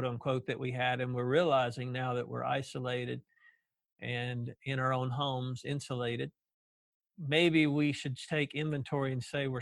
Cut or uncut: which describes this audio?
uncut